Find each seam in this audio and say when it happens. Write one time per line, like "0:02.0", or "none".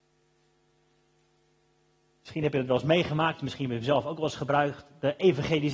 none